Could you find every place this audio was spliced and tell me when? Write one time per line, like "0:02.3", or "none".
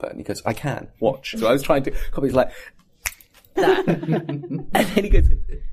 0:01.3
0:03.6